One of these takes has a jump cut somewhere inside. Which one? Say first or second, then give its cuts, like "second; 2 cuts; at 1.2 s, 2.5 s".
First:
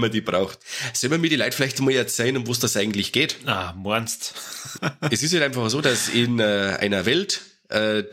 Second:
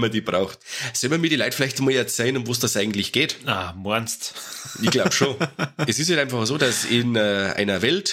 first; 1 cut; at 4.8 s